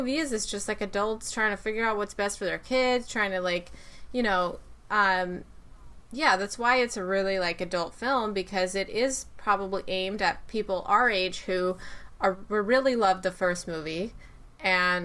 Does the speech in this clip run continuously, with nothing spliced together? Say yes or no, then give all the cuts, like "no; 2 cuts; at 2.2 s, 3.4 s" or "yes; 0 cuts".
yes; 0 cuts